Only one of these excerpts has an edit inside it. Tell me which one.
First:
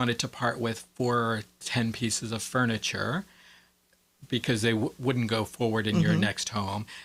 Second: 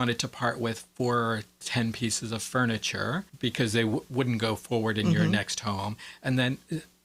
second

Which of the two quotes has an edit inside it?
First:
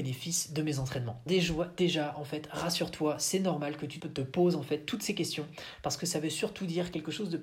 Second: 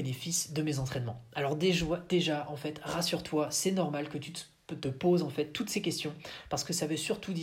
first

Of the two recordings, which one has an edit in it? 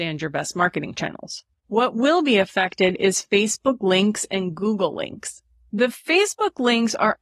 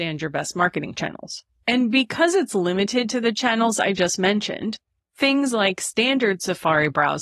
first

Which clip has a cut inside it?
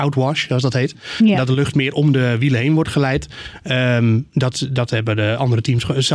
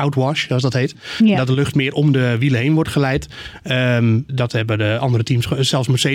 second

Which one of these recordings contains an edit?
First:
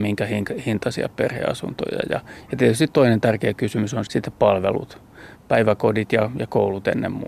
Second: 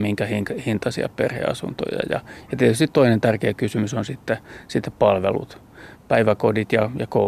first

